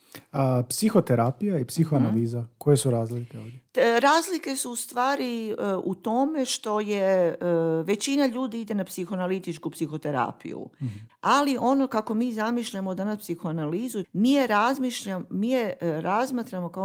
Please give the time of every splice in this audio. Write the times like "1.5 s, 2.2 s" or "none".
11.1 s, 14.0 s

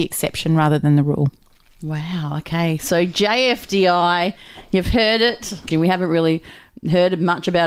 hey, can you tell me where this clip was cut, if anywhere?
5.7 s

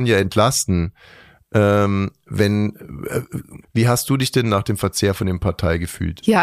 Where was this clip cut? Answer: 3.6 s

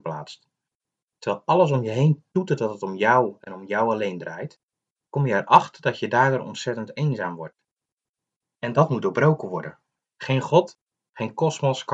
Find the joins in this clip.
10.0 s

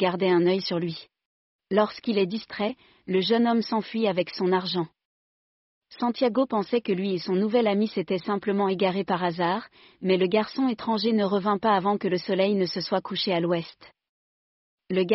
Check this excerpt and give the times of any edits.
1.6 s

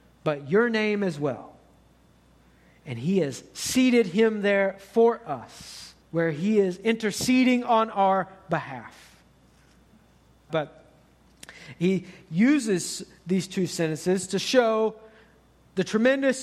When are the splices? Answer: 6.0 s, 10.5 s

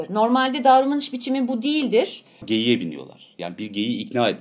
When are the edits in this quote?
2.4 s

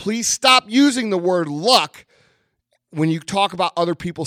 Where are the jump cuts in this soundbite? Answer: none

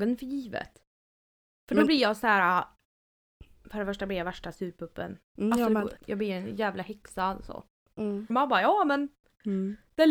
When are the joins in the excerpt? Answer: 6.0 s, 8.3 s

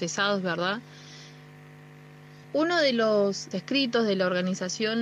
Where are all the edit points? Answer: 2.4 s, 3.5 s

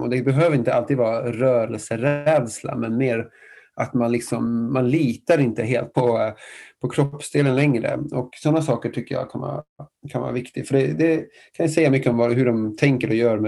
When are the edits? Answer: 5.9 s

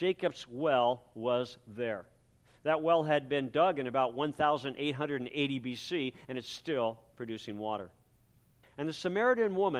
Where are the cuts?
8.6 s

